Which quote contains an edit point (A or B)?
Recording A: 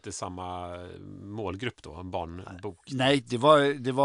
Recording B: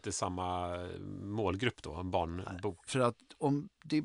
B